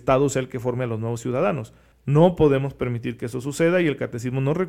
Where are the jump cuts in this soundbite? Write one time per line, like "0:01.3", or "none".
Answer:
0:01.9